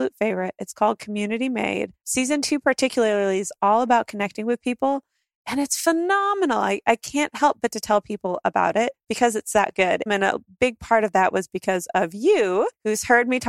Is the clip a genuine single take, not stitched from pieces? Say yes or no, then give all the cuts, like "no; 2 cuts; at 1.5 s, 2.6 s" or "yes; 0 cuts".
no; 1 cut; at 10.1 s